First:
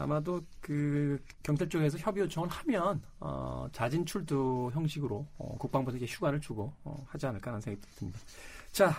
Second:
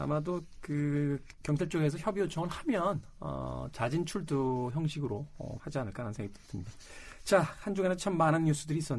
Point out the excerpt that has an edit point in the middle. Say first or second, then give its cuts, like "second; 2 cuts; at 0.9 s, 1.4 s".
second; 1 cut; at 5.6 s